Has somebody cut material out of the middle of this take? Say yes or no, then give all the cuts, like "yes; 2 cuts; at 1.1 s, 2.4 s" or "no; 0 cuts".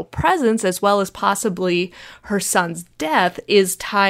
no; 0 cuts